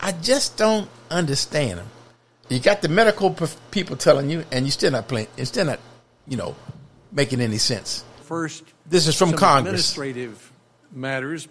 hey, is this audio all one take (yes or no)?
no